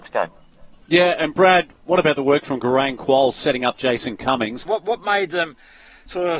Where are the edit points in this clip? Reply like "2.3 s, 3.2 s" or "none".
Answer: 4.7 s